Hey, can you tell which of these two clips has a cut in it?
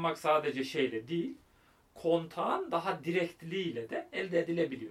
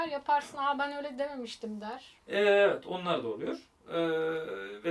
second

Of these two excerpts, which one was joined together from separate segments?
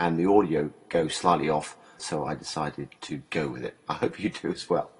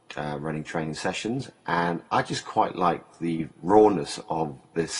first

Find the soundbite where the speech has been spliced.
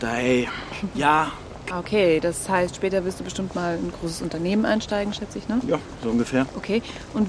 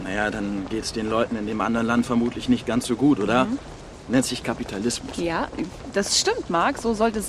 first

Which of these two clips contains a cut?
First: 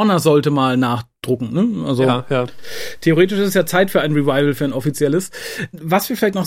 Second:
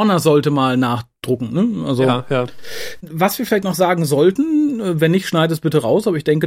second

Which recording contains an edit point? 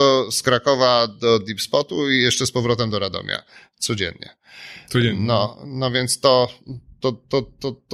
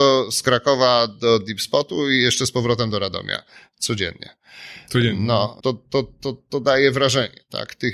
second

